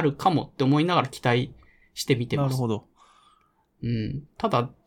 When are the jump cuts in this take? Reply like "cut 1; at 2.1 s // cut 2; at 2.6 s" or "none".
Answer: none